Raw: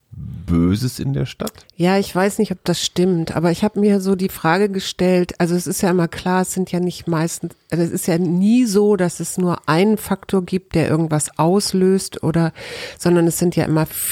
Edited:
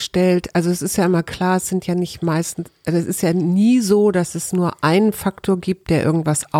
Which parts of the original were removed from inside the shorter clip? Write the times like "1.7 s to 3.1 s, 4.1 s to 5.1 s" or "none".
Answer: none